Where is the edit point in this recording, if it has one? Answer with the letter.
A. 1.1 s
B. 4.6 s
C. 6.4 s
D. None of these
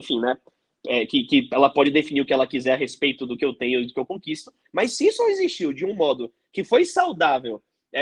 B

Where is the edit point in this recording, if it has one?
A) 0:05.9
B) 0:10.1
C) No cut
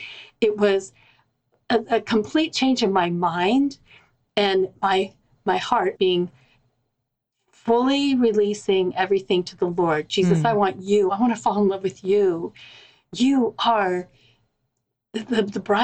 A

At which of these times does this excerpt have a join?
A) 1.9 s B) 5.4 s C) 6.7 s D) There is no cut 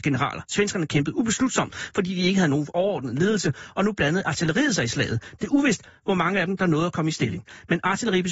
B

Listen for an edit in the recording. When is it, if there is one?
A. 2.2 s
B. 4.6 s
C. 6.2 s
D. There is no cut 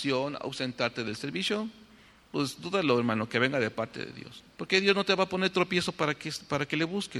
B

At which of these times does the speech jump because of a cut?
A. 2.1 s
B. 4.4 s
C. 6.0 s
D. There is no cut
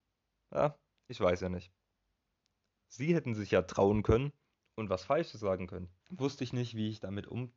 C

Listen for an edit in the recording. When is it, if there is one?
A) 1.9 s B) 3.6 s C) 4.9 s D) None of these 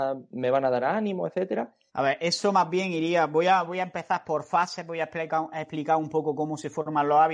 A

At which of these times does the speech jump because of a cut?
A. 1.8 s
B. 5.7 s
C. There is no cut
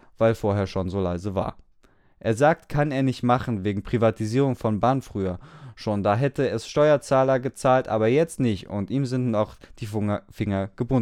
C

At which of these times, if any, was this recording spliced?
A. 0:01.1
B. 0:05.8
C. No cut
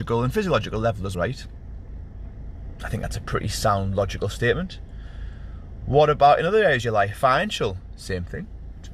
A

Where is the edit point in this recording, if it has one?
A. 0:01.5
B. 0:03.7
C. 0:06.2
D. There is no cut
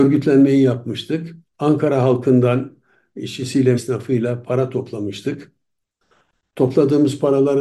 B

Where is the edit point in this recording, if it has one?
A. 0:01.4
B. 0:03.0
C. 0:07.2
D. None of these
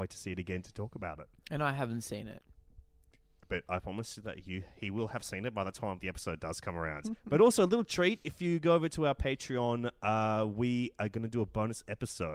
D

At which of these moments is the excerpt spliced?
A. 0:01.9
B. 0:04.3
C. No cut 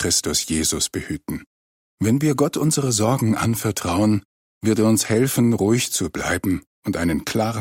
A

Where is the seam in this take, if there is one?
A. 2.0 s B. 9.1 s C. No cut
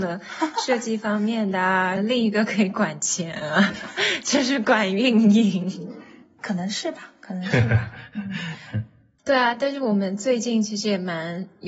A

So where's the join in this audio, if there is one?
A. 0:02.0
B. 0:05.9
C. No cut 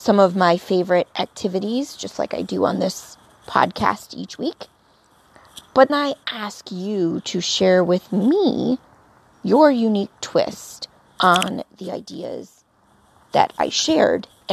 B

